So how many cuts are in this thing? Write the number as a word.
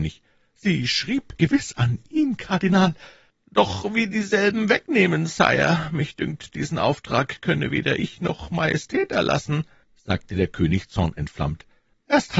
two